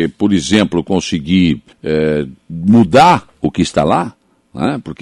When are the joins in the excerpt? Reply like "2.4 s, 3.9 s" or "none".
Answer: 1.7 s